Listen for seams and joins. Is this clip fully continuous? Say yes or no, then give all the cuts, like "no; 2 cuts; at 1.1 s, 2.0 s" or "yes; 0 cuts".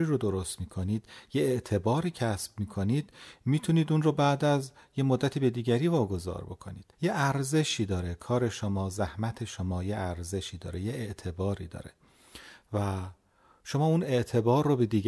no; 1 cut; at 6.9 s